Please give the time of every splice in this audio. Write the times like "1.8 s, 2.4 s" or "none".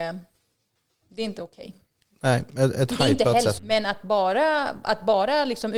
3.6 s